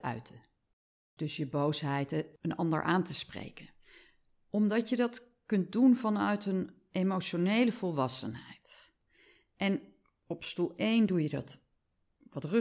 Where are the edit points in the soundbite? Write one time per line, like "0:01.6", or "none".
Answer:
none